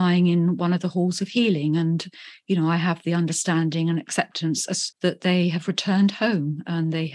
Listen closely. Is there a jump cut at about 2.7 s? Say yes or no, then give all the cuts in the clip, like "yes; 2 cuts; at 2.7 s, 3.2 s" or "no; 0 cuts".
no; 1 cut; at 4.9 s